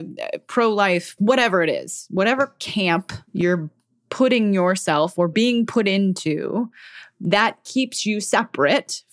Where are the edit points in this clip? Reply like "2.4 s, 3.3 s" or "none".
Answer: 1.2 s, 3.3 s